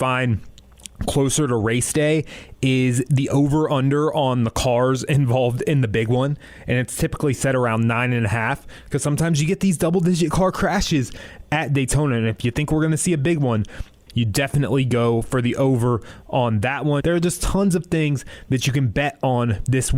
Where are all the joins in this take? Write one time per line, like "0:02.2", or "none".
0:14.1
0:17.0